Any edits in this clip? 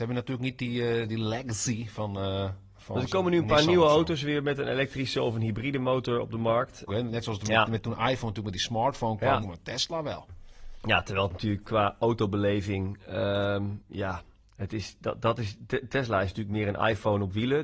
yes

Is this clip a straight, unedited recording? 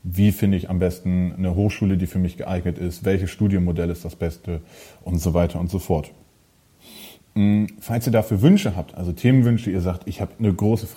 yes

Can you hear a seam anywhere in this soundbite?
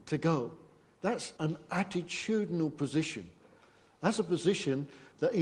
yes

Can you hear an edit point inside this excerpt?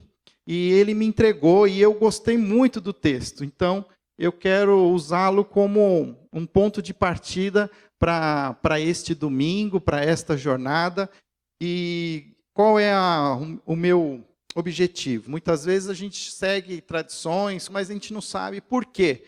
yes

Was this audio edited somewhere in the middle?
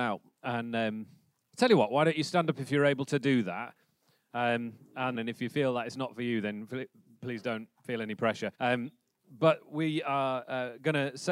yes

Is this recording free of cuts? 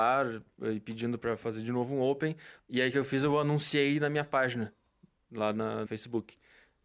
no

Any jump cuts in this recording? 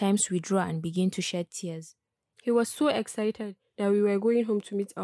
yes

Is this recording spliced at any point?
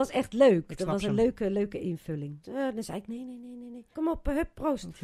yes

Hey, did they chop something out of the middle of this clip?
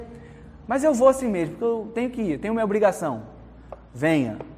no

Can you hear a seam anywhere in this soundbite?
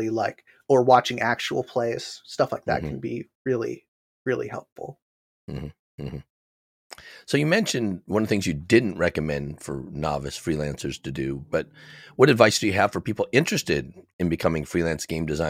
no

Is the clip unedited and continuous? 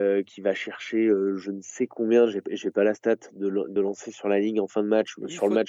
yes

